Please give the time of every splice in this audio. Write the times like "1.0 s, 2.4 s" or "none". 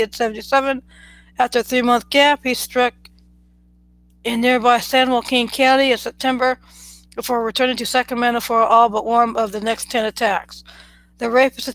none